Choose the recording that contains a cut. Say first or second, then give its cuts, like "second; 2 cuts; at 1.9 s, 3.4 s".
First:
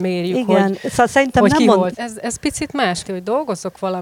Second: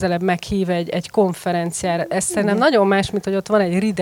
first; 2 cuts; at 1.9 s, 3.0 s